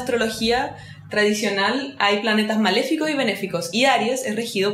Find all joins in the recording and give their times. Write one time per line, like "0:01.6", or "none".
none